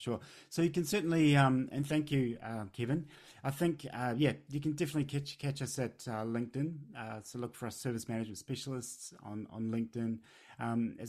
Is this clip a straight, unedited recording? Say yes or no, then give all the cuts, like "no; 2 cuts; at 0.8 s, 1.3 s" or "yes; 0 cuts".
yes; 0 cuts